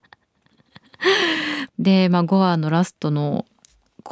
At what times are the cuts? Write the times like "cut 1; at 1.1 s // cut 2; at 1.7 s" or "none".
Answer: cut 1; at 1.7 s